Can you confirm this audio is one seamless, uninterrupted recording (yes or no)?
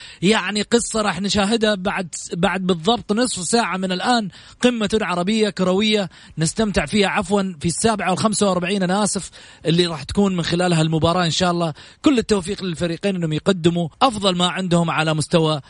no